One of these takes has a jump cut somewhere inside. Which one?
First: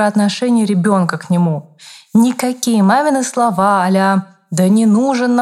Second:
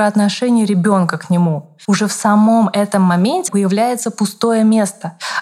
second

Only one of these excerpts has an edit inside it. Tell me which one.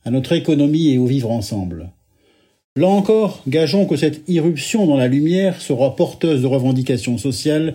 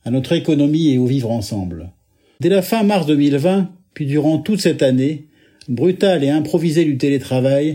second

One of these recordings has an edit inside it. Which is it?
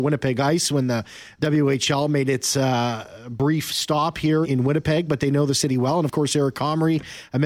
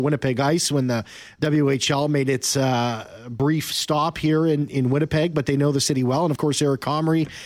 first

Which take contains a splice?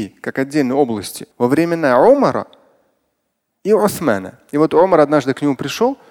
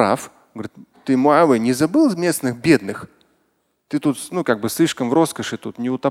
first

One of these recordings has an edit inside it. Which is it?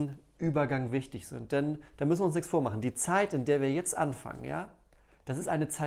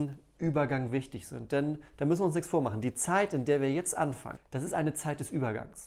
second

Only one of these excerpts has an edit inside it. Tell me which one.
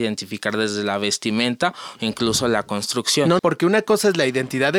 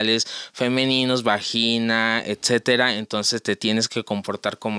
first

